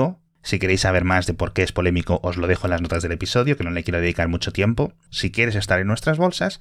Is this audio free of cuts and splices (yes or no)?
no